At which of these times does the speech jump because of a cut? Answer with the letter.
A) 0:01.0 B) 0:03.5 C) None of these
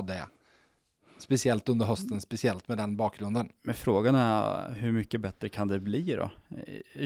C